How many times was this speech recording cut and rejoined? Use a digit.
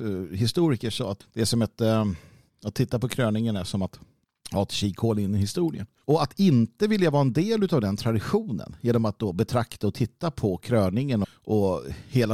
3